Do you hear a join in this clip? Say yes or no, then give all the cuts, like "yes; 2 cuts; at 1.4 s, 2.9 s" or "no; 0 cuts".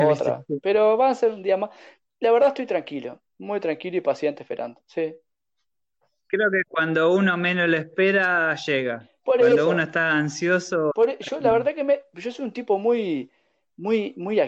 no; 0 cuts